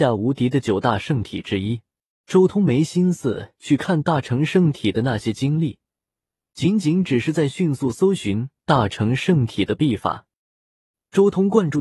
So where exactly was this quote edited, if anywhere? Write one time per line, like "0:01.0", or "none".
0:02.2